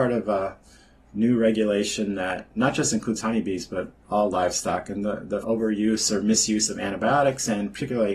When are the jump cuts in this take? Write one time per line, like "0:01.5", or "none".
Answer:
0:05.4